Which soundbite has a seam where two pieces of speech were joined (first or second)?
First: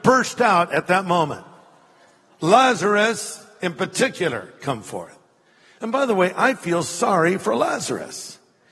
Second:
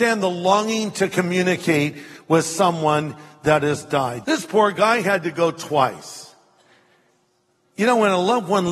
second